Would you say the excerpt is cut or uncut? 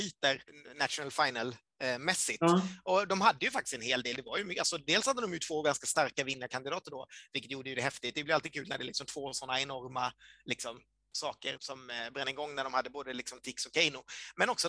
cut